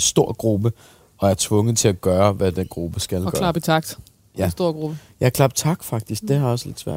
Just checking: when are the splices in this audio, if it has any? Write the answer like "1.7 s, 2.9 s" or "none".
none